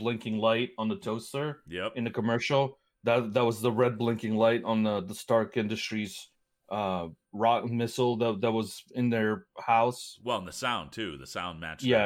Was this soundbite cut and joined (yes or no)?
no